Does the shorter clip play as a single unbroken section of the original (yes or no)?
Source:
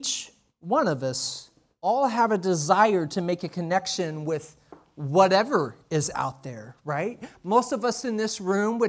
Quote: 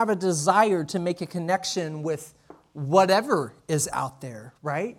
yes